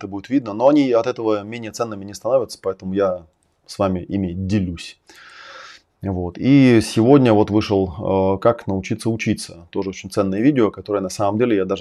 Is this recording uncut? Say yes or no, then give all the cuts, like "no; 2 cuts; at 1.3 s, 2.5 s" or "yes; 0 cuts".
yes; 0 cuts